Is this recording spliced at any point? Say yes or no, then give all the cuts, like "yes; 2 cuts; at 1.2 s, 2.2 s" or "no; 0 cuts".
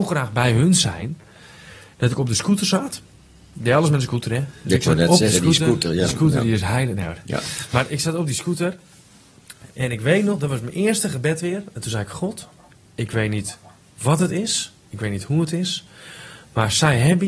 no; 0 cuts